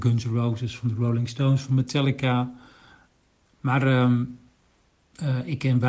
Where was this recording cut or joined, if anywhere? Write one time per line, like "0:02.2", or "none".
0:03.4